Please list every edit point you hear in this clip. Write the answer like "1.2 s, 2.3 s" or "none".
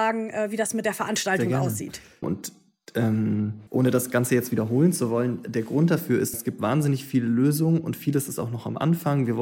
2.2 s, 3.7 s, 6.3 s